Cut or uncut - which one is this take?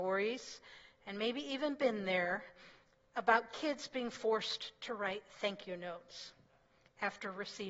uncut